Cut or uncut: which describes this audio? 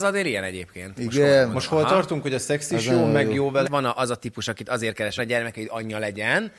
cut